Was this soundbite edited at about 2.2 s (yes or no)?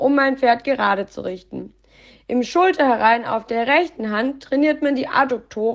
yes